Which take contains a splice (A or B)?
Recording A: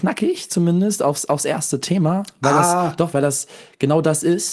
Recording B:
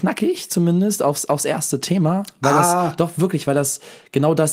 A